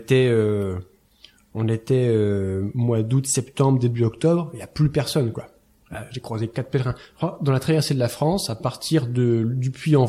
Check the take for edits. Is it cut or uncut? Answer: uncut